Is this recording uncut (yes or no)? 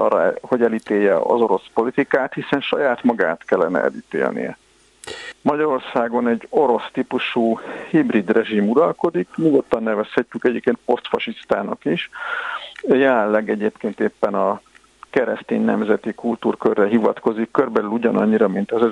no